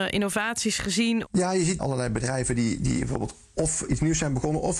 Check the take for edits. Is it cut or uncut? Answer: cut